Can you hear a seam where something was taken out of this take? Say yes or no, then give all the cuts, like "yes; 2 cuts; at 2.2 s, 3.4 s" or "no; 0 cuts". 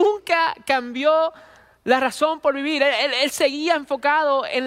no; 0 cuts